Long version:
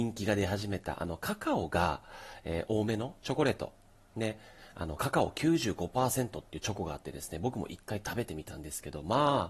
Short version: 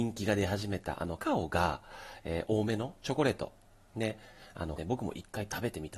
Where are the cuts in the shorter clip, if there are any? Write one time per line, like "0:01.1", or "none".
0:01.2
0:04.8